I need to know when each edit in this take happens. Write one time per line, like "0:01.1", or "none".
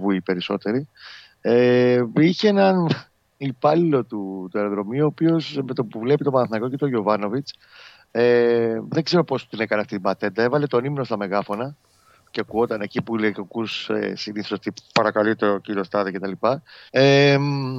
0:16.9